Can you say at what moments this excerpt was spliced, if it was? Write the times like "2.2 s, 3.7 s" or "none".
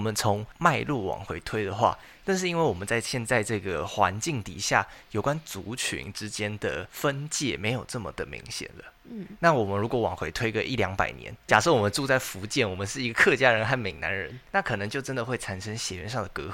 11.5 s